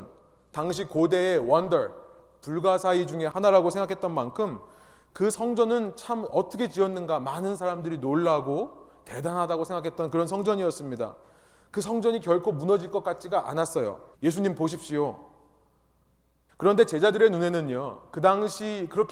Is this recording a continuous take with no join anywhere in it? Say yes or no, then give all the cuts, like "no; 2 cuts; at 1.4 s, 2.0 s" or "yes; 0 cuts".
no; 2 cuts; at 14.1 s, 16.5 s